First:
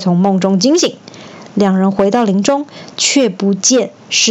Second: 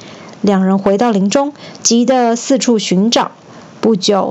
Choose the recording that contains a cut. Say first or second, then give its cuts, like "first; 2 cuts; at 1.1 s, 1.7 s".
second; 1 cut; at 1.8 s